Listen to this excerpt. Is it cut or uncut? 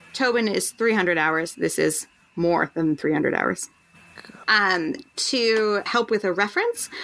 cut